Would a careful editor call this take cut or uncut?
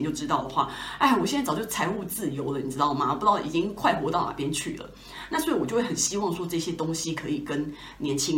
uncut